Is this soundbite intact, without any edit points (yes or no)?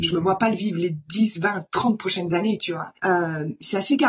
no